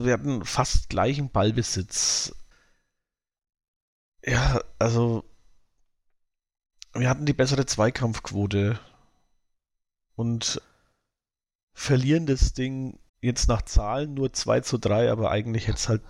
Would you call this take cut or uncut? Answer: cut